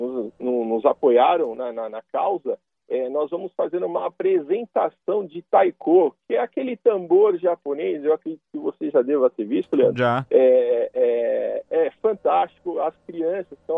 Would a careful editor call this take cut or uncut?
uncut